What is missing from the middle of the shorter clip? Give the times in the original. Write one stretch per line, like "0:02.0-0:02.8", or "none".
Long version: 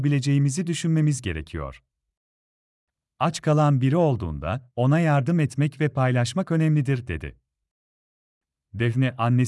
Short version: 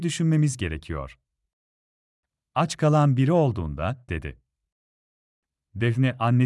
0:04.7-0:07.1